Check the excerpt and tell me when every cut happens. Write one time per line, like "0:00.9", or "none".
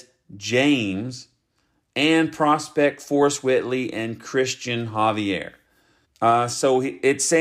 0:06.0